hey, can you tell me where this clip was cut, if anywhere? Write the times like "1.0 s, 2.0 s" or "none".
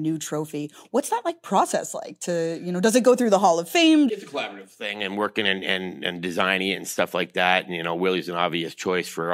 4.1 s